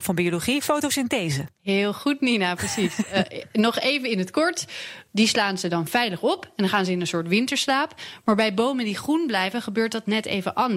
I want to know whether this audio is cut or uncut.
cut